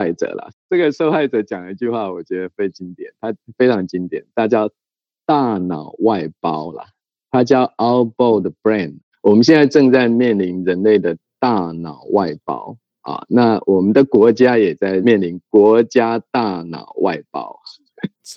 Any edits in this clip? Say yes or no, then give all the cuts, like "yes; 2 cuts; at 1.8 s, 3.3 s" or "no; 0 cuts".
no; 0 cuts